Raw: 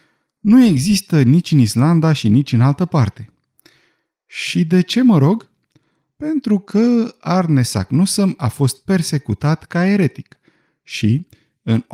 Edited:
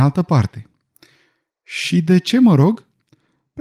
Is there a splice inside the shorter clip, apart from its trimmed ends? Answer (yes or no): no